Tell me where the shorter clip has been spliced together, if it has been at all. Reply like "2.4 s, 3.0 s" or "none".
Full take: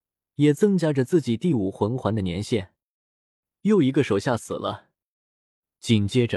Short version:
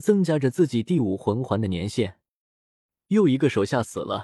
none